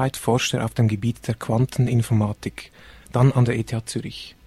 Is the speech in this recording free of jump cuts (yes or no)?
no